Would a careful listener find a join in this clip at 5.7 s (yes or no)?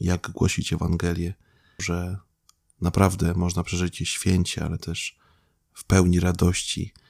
no